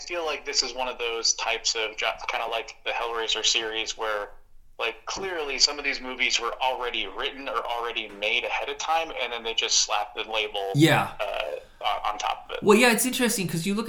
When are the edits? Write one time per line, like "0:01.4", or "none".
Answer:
none